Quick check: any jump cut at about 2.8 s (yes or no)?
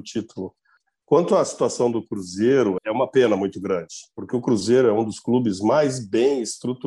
yes